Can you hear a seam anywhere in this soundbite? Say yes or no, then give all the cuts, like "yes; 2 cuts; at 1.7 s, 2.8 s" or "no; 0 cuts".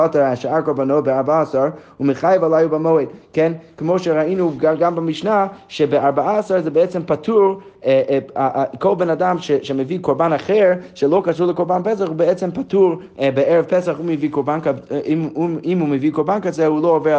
no; 0 cuts